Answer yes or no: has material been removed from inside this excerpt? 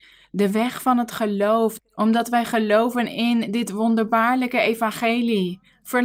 yes